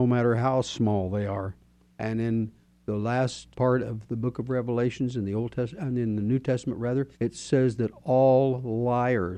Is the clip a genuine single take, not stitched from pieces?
no; 3 cuts; at 1.9 s, 3.5 s, 7.1 s

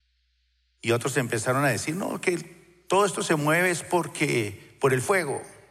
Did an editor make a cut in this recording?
no; 0 cuts

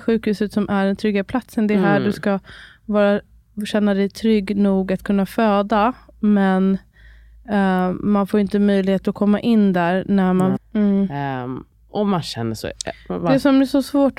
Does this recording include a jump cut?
yes; 1 cut; at 10.6 s

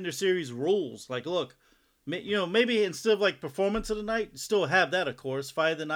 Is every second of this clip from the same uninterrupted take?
yes; 0 cuts

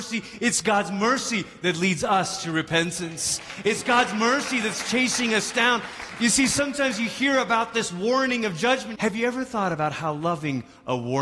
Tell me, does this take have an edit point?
yes; 1 cut; at 8.9 s

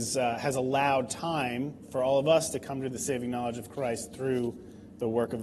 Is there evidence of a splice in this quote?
no; 0 cuts

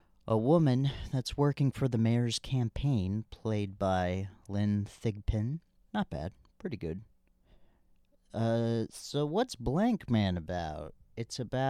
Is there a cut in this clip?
yes; 1 cut; at 5.8 s

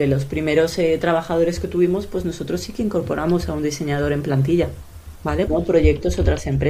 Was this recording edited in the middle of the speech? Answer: yes; 1 cut; at 5.5 s

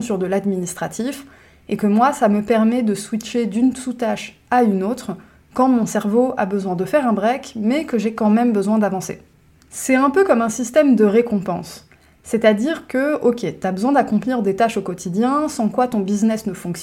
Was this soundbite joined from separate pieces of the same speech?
yes; 1 cut; at 9.6 s

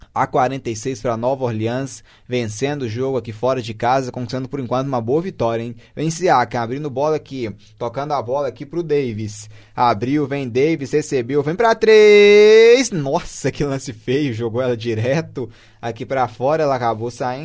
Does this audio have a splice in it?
no; 0 cuts

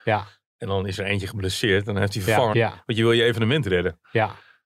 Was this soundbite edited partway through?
yes; 1 cut; at 2.5 s

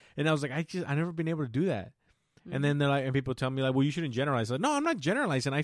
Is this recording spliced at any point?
no; 0 cuts

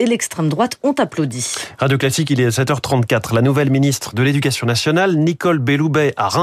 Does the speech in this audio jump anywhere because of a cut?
no; 0 cuts

